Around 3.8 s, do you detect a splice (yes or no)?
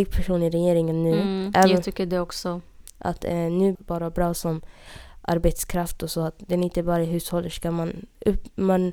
yes